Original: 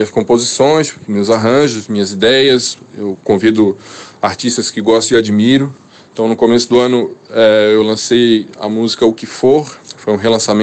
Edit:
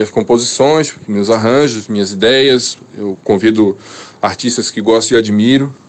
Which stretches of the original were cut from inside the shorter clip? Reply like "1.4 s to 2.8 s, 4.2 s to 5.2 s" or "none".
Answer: none